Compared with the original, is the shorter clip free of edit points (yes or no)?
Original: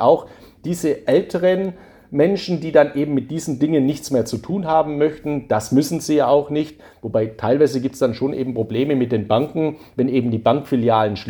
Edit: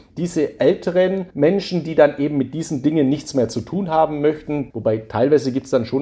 no